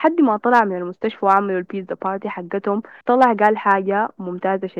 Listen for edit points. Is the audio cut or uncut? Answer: cut